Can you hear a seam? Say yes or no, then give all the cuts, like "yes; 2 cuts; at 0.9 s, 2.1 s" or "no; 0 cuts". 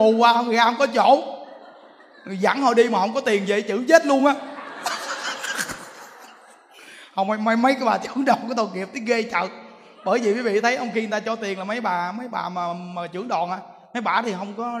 no; 0 cuts